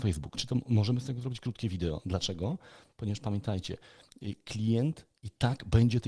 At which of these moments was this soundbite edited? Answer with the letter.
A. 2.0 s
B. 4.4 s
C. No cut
C